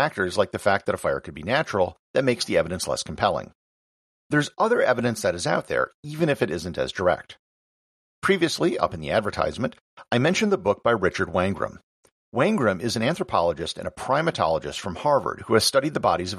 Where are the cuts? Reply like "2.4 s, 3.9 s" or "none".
none

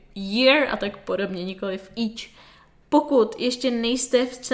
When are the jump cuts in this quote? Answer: 2.8 s

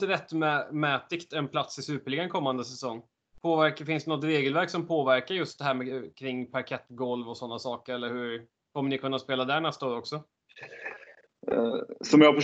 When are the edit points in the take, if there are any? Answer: 3.3 s

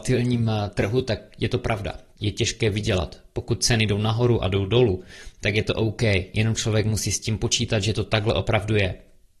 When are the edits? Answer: 2.1 s

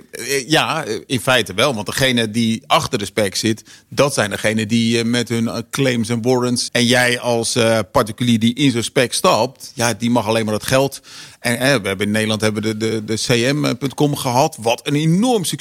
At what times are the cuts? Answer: 6.7 s

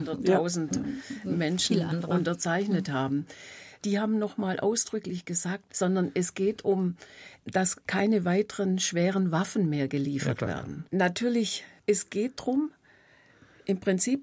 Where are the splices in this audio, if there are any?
5.7 s

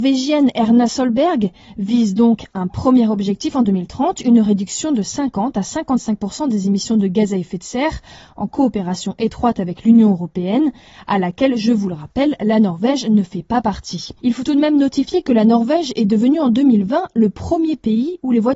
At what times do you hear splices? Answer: 14.2 s

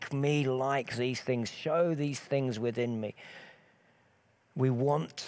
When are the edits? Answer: none

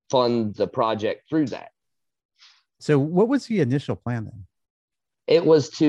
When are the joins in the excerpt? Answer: 2.8 s

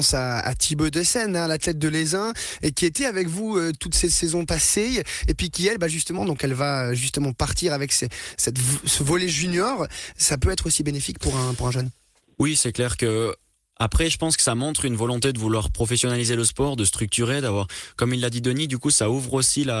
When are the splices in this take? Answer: 6.2 s, 10.1 s

